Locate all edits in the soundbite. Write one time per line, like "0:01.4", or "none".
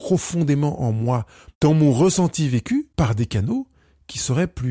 0:01.5
0:02.9